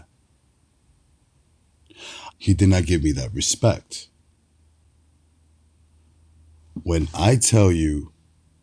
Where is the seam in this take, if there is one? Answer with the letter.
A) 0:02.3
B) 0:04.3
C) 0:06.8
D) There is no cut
A